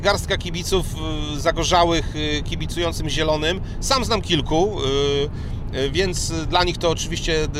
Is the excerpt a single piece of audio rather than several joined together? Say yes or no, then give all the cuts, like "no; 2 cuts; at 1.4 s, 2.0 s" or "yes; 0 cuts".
yes; 0 cuts